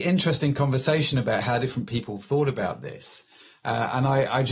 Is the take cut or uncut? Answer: uncut